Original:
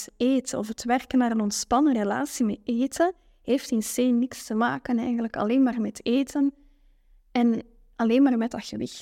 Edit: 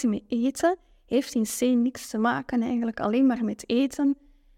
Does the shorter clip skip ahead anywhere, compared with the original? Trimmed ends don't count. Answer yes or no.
no